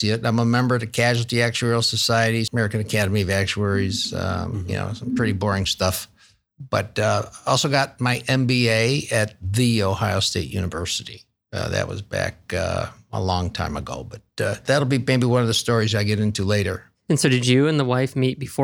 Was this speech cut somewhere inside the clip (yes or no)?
yes